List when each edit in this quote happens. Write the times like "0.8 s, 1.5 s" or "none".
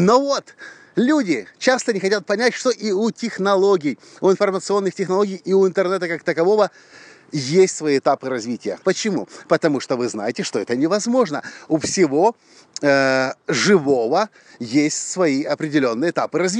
8.8 s